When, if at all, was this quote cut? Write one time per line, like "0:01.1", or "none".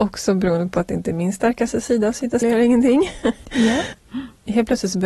0:02.4
0:04.0